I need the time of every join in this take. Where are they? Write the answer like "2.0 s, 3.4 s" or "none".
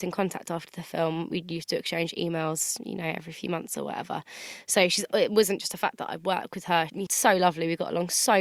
7.1 s